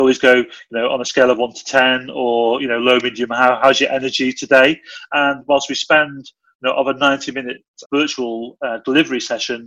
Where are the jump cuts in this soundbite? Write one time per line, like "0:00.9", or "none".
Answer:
0:05.1
0:07.8